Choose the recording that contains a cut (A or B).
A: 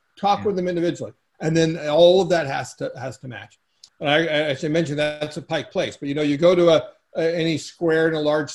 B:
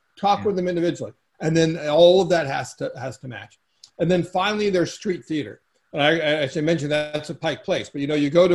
A